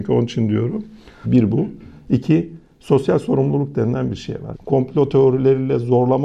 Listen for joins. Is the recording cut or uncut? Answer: cut